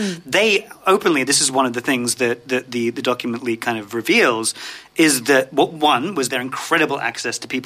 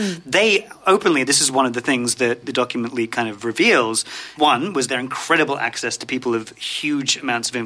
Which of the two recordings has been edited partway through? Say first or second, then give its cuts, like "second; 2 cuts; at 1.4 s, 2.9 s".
second; 2 cuts; at 2.4 s, 4.4 s